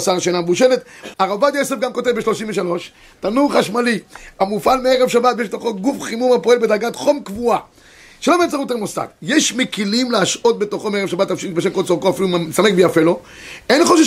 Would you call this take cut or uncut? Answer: cut